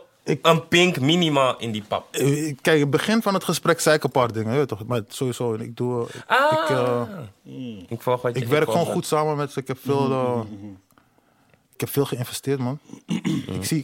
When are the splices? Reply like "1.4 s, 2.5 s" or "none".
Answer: none